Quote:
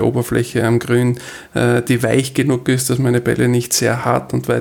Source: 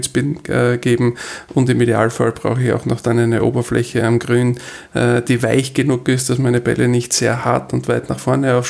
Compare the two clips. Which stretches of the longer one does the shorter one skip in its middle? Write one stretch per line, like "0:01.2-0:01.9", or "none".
none